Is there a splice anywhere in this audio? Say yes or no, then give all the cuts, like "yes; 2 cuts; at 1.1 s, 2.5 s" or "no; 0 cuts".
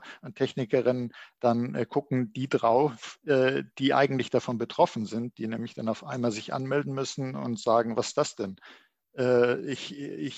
no; 0 cuts